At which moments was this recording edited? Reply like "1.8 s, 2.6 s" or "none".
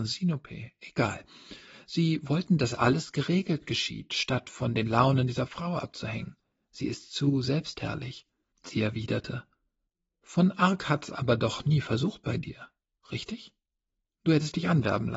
8.5 s, 14.0 s